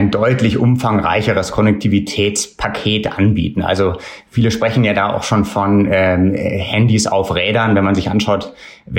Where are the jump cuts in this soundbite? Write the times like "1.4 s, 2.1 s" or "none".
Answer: none